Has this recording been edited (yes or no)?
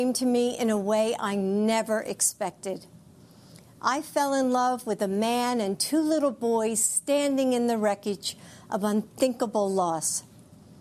no